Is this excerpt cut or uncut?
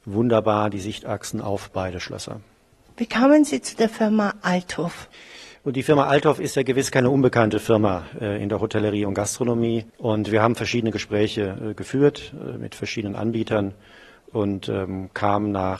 uncut